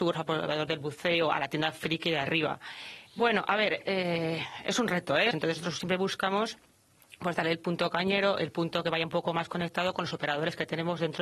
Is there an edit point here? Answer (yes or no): yes